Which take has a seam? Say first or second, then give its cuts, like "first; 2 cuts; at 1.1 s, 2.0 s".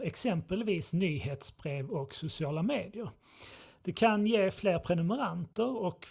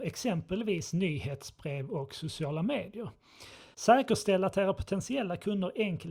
second; 1 cut; at 3.7 s